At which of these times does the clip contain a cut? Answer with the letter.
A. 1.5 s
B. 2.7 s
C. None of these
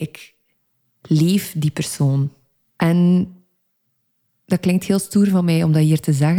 B